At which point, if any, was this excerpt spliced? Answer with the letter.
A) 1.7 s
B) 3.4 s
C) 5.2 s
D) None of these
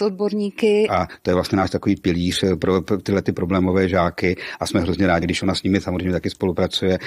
C